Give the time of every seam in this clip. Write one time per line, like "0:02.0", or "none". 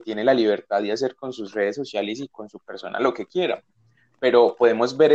none